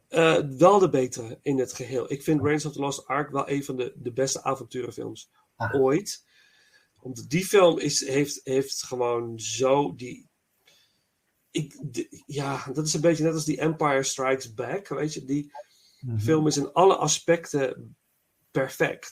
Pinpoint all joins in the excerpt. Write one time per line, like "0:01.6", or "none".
none